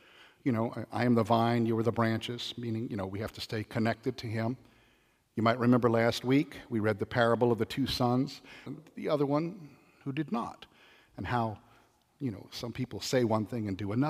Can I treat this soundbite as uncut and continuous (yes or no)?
no